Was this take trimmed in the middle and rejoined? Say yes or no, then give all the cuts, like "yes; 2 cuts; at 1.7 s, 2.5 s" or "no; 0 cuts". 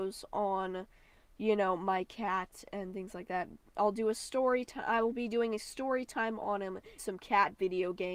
yes; 1 cut; at 7.0 s